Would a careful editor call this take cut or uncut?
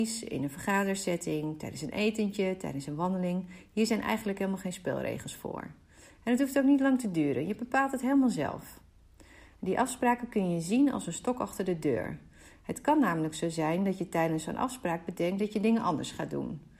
uncut